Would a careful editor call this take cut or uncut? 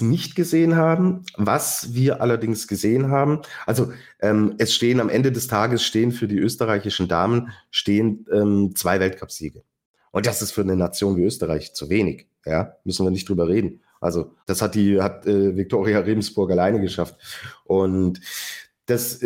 cut